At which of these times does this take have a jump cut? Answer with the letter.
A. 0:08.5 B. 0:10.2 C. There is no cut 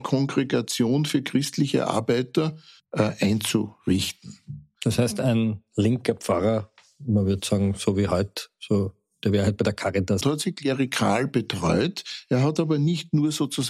B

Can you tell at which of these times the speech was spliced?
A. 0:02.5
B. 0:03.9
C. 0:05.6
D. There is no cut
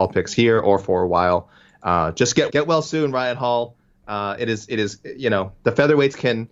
A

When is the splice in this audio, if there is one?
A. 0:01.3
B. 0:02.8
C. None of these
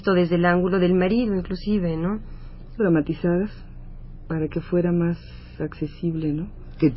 B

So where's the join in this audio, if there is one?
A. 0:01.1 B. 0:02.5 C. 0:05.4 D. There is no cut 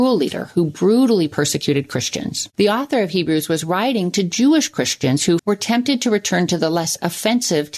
C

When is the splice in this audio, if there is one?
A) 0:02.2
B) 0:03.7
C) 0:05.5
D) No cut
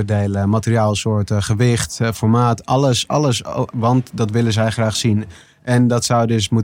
B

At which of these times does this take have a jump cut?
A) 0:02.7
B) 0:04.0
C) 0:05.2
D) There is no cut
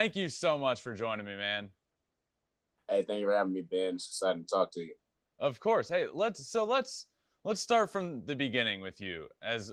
D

